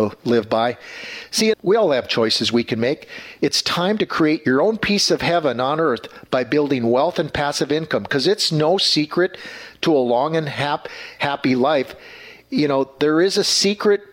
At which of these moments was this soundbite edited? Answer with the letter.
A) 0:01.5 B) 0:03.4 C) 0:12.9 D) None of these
A